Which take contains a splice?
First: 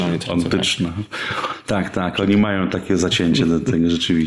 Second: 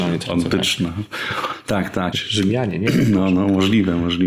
second; 1 cut; at 2.1 s

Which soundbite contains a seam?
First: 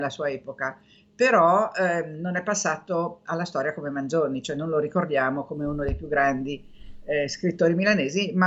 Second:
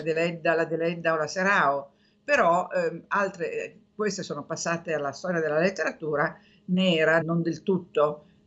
second; 1 cut; at 7.2 s

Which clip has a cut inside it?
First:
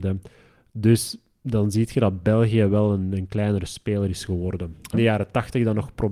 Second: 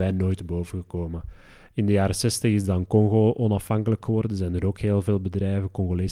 first; 1 cut; at 4.9 s

